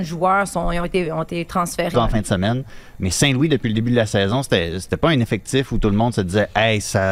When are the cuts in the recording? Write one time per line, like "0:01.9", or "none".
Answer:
0:01.9